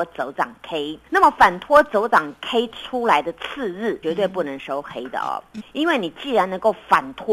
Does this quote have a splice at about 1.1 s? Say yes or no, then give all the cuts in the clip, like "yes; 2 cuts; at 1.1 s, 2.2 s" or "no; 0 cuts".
yes; 3 cuts; at 1.1 s, 4.0 s, 5.6 s